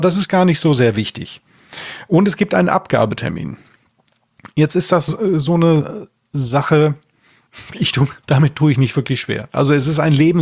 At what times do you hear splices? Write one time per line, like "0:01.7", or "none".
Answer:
none